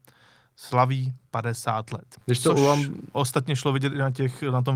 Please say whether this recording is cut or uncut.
cut